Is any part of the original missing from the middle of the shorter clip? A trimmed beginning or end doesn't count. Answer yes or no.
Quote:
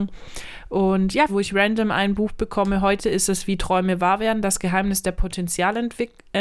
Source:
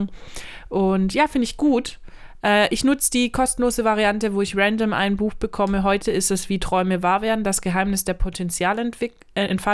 yes